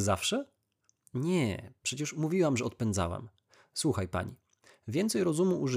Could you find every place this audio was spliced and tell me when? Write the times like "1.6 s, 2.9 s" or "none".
none